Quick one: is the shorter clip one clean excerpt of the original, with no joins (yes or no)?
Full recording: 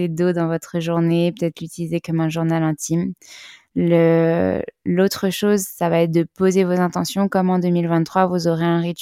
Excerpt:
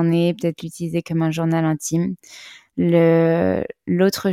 yes